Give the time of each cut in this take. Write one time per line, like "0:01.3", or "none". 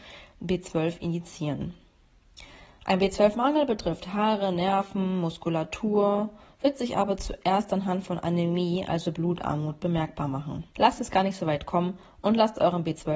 0:10.7